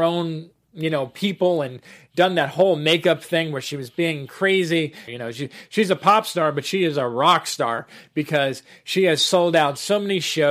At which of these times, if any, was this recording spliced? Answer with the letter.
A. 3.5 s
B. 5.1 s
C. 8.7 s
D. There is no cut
B